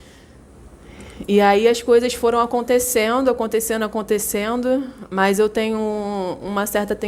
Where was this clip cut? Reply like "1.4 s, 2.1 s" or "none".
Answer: none